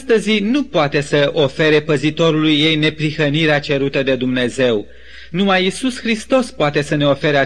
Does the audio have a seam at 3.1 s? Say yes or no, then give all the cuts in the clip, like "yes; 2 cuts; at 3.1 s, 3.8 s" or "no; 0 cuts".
no; 1 cut; at 5.3 s